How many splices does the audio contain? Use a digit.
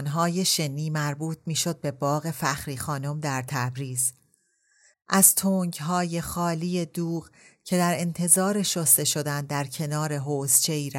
1